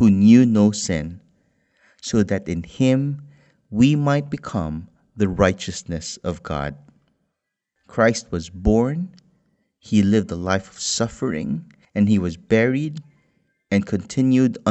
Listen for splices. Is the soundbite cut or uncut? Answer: cut